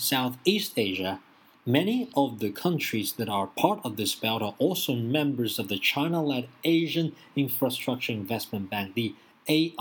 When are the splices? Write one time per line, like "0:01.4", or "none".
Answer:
none